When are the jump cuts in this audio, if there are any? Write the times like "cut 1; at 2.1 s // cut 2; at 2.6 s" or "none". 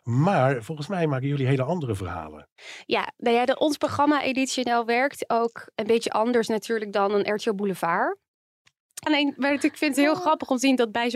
cut 1; at 9.1 s